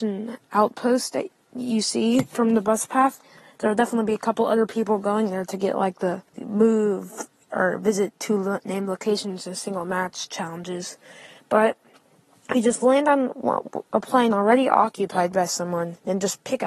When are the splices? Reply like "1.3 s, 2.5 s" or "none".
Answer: 6.3 s

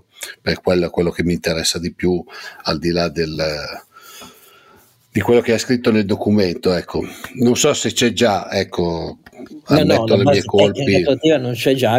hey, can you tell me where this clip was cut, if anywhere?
none

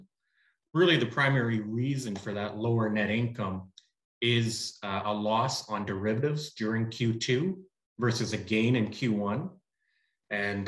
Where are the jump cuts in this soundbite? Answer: none

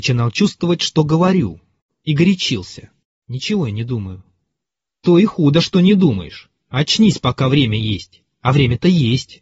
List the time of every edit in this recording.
3.2 s

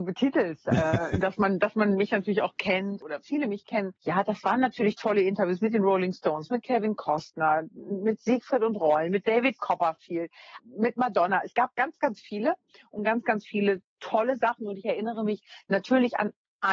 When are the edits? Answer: 10.6 s

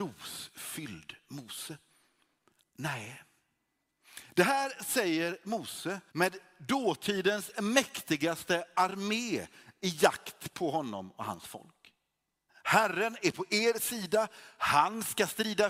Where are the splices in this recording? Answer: 2.6 s, 6.1 s, 12.5 s

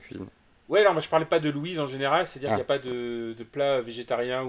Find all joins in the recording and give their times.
none

